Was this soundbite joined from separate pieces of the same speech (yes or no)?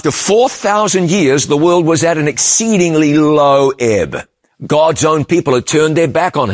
no